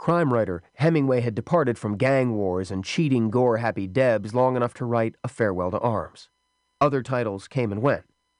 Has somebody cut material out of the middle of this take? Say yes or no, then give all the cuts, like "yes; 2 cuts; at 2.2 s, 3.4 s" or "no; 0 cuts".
yes; 1 cut; at 6.7 s